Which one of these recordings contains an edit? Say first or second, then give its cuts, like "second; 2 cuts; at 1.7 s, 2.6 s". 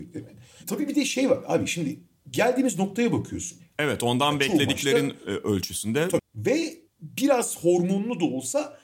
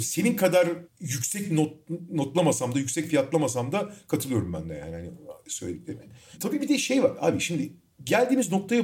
first; 2 cuts; at 3.7 s, 6.2 s